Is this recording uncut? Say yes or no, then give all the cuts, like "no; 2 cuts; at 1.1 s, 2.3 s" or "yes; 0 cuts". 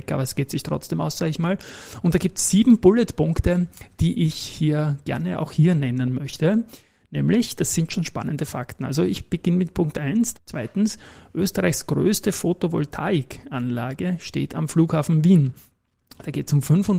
no; 1 cut; at 10.3 s